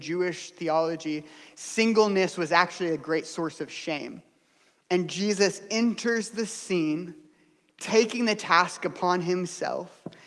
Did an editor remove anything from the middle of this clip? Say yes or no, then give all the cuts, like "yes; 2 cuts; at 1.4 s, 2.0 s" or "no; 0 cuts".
no; 0 cuts